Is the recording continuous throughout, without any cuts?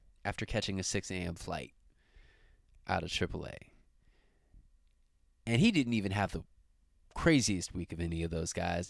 yes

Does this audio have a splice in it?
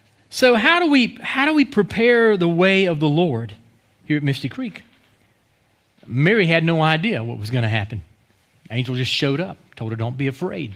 no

